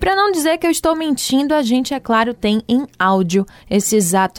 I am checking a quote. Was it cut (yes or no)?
no